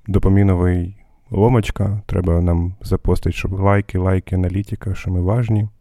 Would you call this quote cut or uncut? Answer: uncut